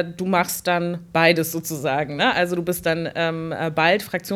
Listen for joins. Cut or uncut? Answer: uncut